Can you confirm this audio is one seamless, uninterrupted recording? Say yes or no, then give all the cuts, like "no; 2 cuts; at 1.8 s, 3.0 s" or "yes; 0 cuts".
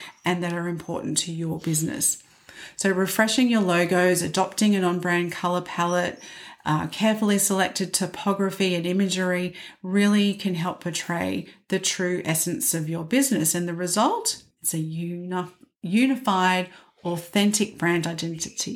no; 1 cut; at 14.5 s